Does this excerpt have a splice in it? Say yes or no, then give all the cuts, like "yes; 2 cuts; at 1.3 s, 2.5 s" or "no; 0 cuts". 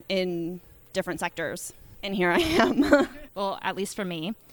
yes; 1 cut; at 3.3 s